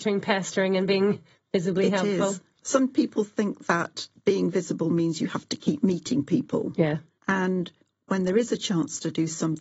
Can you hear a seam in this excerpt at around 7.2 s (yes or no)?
yes